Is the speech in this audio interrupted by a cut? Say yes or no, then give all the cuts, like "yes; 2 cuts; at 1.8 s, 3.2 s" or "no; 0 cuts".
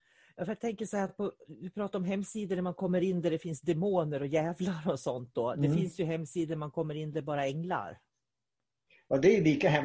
no; 0 cuts